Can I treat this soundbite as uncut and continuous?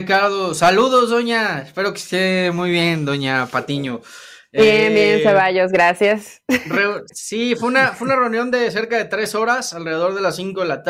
yes; 0 cuts

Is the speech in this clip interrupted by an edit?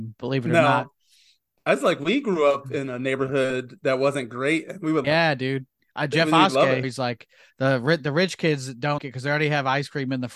yes; 3 cuts; at 5.0 s, 6.8 s, 9.0 s

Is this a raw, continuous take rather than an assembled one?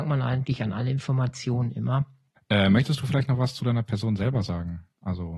no; 1 cut; at 2.4 s

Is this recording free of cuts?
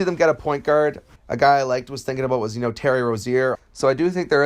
no; 2 cuts; at 1.2 s, 3.5 s

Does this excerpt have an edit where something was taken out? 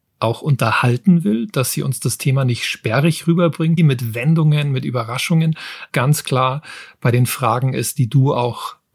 yes; 2 cuts; at 3.8 s, 5.9 s

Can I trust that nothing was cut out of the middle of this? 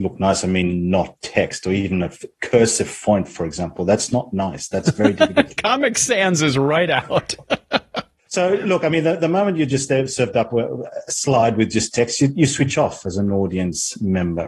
yes; 0 cuts

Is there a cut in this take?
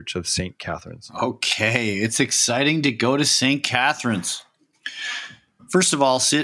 no; 0 cuts

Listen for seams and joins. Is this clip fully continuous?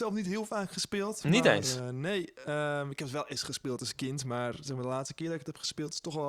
yes; 0 cuts

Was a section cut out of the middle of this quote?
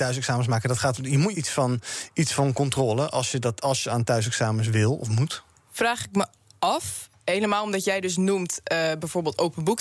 yes; 1 cut; at 1.3 s

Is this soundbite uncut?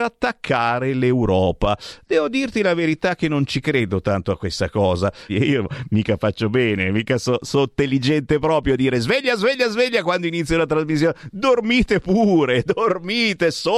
no; 1 cut; at 5.3 s

